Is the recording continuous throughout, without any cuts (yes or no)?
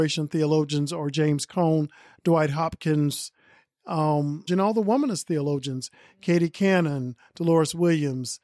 no